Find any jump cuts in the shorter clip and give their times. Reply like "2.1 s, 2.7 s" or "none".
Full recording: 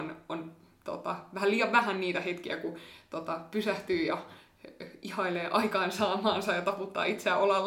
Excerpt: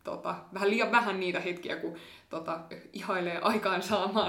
2.7 s

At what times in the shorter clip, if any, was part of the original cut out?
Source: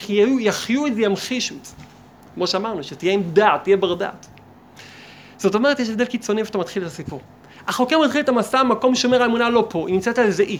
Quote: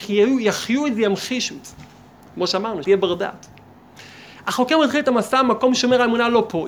2.8 s, 4.3 s

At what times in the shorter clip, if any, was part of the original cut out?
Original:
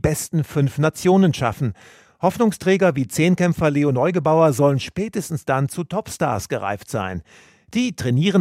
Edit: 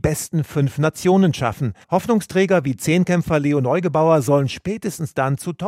1.8 s

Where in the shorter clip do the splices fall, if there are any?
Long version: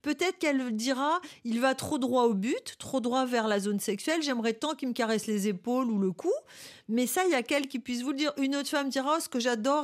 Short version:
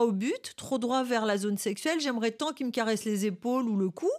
none

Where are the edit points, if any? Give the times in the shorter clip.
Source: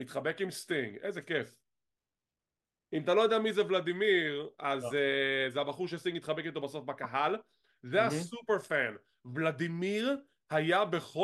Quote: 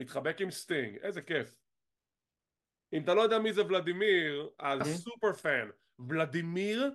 4.8 s

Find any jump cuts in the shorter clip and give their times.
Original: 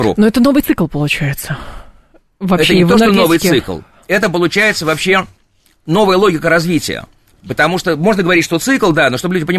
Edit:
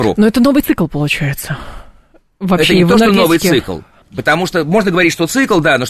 4.0 s

